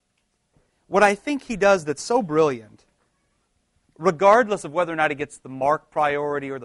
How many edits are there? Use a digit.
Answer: 0